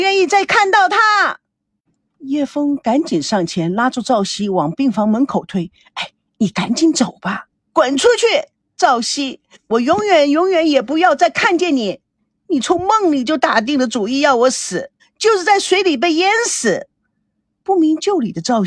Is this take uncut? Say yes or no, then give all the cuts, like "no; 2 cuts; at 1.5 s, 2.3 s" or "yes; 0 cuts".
no; 2 cuts; at 7.6 s, 15.0 s